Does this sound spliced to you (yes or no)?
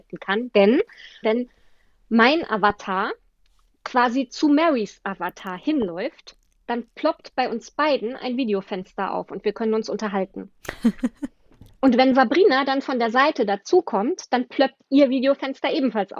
yes